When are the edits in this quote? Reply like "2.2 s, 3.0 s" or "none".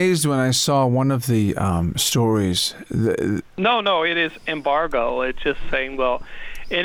3.4 s